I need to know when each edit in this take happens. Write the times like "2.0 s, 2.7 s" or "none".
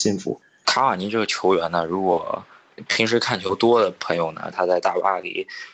4.5 s